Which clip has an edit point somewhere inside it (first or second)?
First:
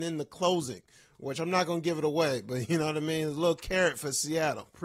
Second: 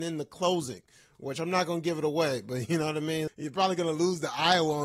second